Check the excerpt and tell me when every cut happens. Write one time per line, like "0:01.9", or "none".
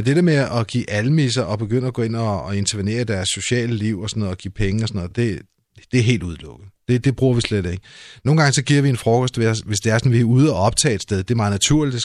none